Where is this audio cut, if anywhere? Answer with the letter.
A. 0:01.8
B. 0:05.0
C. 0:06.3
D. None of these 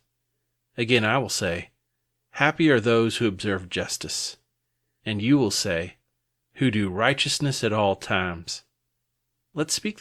D